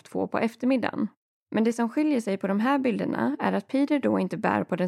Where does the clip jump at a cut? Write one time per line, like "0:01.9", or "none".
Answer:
0:01.4

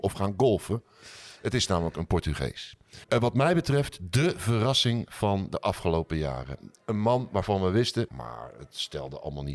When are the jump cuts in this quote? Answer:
0:03.0
0:08.1

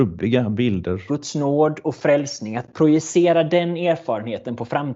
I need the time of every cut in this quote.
0:01.1

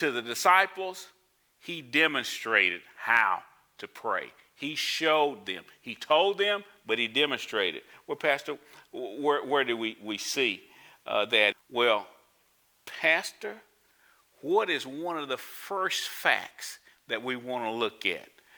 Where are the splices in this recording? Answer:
0:11.5

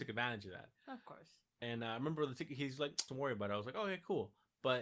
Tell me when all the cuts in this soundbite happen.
0:03.1

